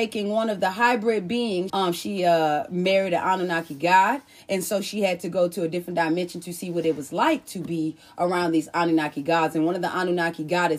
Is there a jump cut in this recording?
yes; 1 cut; at 1.7 s

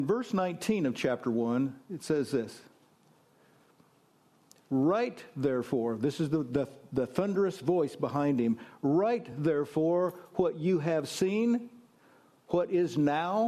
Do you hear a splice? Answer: no; 0 cuts

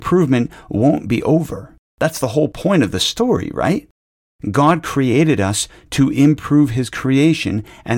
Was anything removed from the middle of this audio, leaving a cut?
no; 0 cuts

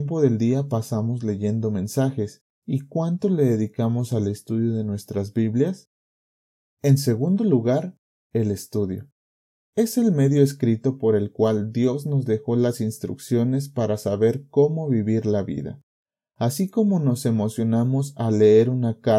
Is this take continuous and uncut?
no; 1 cut; at 6.7 s

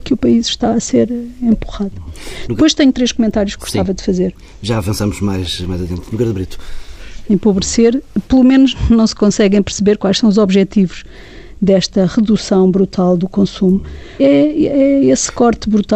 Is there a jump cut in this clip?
yes; 2 cuts; at 7.3 s, 14.2 s

